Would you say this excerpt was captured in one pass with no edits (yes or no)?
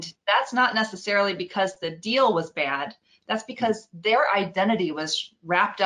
yes